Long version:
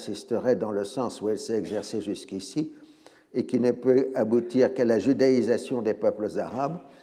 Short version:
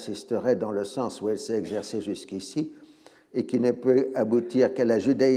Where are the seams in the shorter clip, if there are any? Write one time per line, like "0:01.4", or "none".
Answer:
none